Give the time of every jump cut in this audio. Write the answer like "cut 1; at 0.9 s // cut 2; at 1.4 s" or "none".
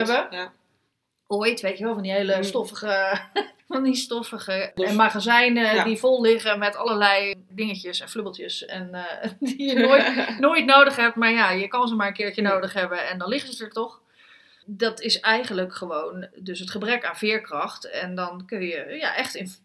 none